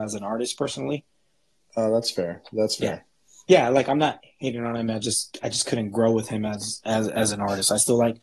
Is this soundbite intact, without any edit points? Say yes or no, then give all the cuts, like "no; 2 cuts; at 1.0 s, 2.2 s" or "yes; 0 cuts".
yes; 0 cuts